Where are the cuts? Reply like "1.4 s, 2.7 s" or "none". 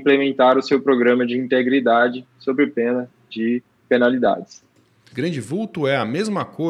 5.1 s